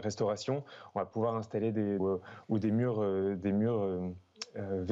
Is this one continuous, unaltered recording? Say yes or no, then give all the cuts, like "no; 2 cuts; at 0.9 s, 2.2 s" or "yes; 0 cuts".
no; 1 cut; at 2.0 s